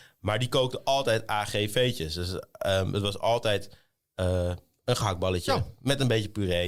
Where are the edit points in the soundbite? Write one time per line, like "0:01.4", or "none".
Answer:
none